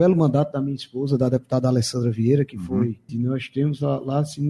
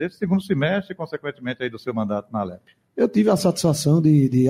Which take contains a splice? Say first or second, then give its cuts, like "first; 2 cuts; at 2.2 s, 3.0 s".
first; 1 cut; at 3.1 s